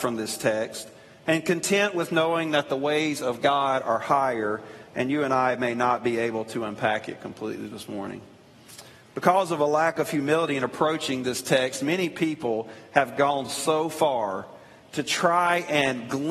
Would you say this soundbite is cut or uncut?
uncut